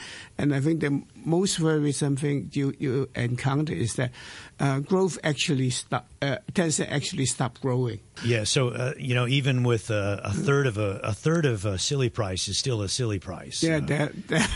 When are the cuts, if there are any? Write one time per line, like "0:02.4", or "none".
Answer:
0:08.2